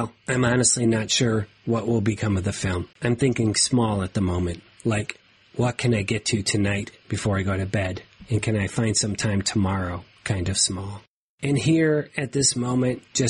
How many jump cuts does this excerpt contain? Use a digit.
1